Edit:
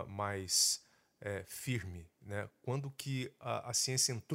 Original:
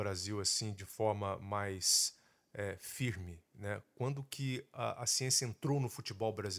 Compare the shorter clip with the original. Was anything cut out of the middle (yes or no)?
no